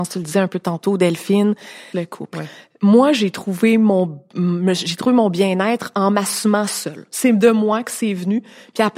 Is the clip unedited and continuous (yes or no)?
no